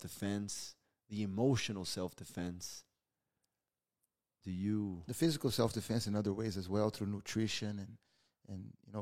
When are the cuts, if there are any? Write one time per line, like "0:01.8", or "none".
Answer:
none

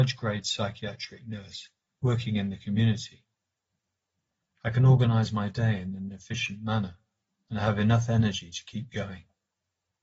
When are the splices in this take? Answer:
0:04.4

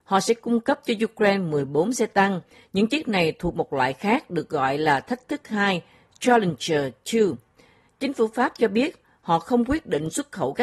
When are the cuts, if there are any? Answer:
none

